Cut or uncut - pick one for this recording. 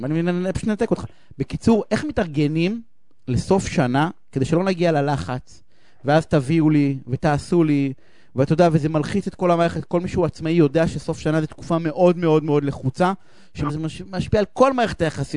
cut